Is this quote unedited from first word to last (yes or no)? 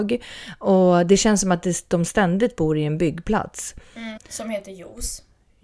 no